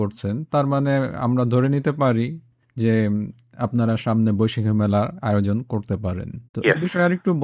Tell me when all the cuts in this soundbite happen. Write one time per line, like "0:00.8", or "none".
0:06.5